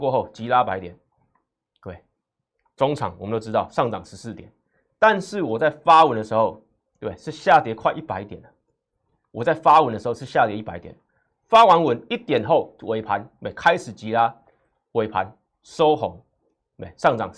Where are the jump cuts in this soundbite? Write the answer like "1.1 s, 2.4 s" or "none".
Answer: none